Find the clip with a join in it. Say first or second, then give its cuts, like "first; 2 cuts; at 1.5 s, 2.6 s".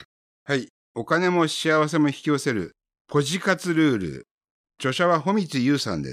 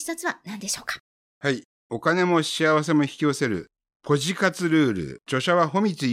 second; 1 cut; at 5.2 s